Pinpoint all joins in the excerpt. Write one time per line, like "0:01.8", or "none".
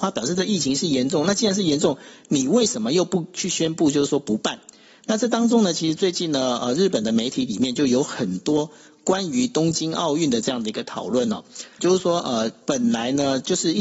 0:11.8